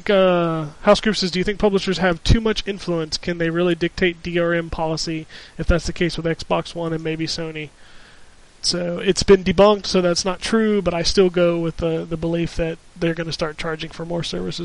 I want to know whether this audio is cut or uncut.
cut